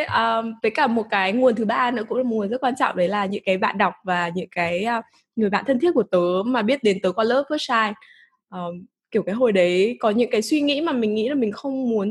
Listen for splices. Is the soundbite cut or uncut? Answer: uncut